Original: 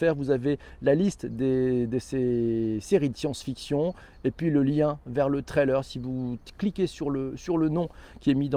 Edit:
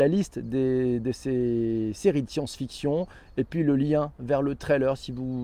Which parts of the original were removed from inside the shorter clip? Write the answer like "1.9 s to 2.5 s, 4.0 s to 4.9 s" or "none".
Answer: none